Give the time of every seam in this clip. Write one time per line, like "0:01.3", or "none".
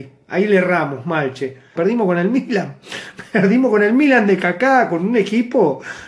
0:01.7